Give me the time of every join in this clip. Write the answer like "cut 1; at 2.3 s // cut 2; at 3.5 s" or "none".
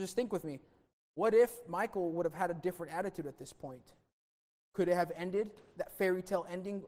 none